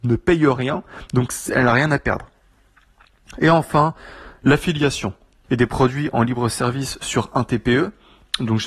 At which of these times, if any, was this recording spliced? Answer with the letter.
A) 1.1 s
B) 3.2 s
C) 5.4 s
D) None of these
C